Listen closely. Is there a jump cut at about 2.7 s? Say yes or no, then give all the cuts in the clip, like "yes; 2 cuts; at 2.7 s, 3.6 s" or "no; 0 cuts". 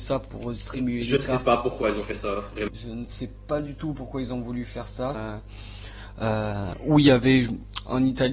yes; 2 cuts; at 2.7 s, 5.1 s